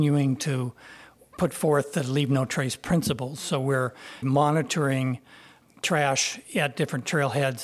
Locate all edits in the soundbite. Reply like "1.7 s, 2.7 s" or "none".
4.2 s